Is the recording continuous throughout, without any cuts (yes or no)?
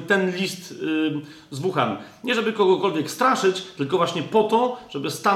yes